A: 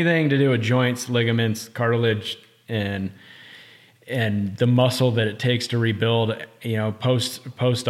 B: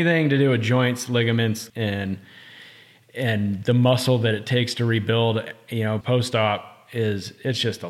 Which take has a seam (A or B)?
B